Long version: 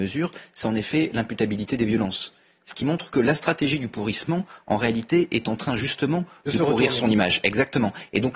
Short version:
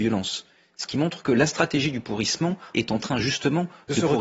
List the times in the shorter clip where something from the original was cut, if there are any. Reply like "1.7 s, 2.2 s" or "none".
2.7 s